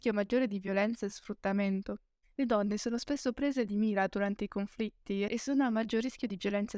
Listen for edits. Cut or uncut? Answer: cut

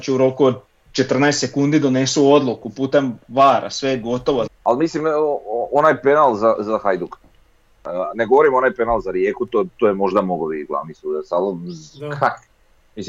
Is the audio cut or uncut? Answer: cut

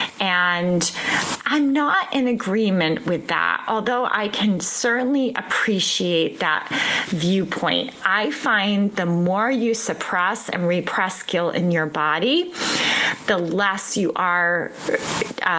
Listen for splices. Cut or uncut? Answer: cut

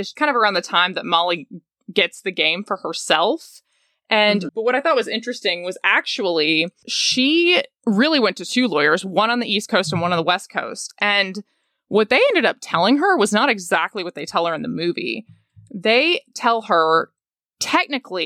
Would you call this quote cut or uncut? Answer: cut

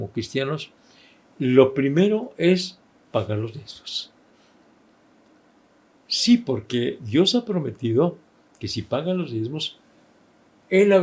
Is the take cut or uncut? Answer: uncut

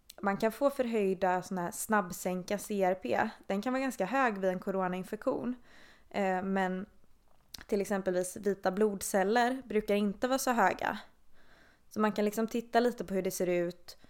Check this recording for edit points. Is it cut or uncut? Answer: uncut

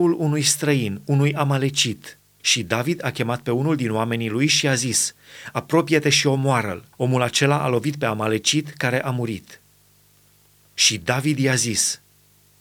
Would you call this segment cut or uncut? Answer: cut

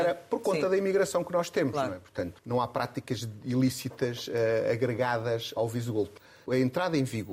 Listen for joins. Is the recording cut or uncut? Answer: cut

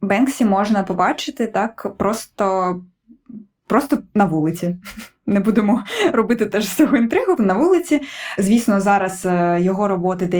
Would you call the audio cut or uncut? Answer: cut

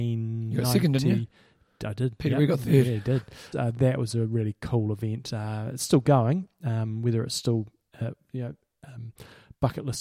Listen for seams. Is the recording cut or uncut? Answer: cut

